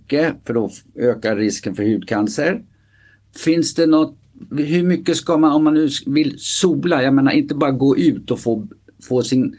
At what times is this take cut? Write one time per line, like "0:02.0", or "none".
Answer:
none